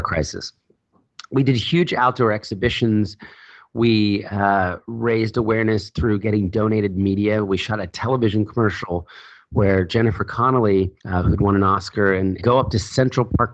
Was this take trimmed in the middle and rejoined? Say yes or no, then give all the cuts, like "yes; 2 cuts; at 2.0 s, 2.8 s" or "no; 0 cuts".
yes; 2 cuts; at 11.0 s, 12.4 s